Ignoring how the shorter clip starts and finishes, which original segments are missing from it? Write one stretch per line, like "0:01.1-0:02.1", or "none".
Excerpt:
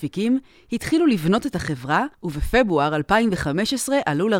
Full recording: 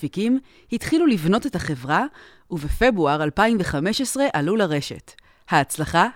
0:02.1-0:02.4